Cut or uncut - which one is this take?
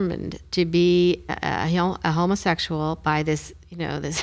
cut